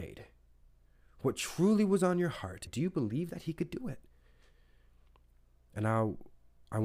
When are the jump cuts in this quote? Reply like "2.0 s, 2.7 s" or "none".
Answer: 2.7 s, 5.6 s